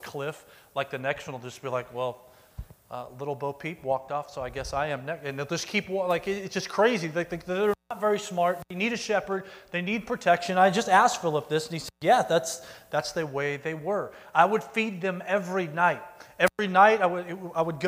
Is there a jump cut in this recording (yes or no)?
no